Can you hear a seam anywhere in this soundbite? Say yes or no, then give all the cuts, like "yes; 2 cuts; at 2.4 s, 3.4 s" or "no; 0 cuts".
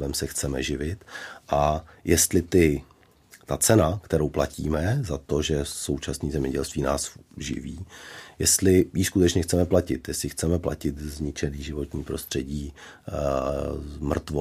no; 0 cuts